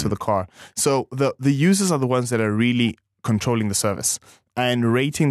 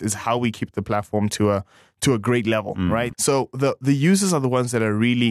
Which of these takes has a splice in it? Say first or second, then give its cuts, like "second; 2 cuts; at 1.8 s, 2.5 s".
second; 1 cut; at 3.1 s